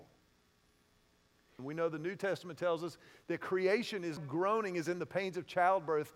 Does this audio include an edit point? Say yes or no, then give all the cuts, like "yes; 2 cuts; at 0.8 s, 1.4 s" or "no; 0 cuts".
yes; 2 cuts; at 1.6 s, 4.2 s